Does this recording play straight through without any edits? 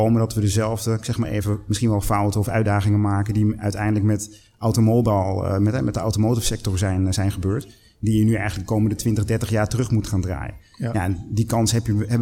yes; 0 cuts

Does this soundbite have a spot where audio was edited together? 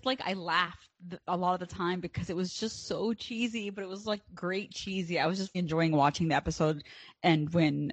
yes; 1 cut; at 5.5 s

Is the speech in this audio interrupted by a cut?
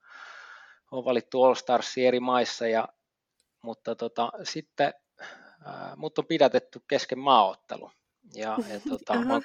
no; 0 cuts

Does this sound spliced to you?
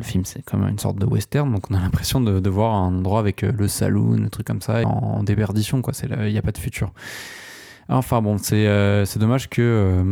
yes; 1 cut; at 4.8 s

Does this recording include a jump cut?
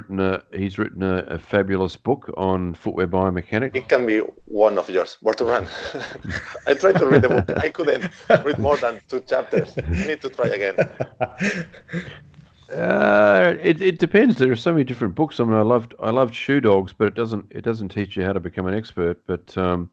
yes; 1 cut; at 3.7 s

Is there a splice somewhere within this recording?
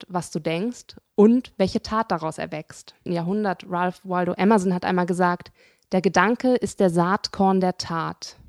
yes; 1 cut; at 3.1 s

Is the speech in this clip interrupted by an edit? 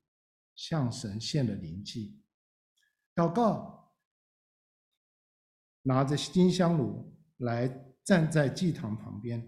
yes; 1 cut; at 5.7 s

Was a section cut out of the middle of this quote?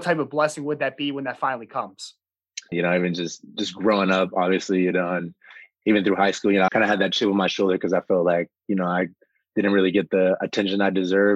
yes; 2 cuts; at 2.7 s, 6.7 s

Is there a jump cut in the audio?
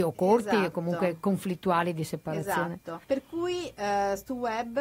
yes; 1 cut; at 3.0 s

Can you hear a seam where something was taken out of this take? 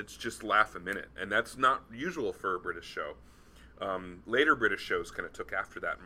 no; 0 cuts

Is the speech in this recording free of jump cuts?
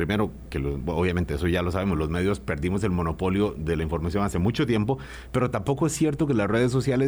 yes; 0 cuts

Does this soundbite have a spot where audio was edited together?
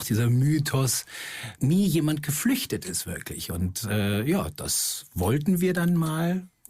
yes; 1 cut; at 1.6 s

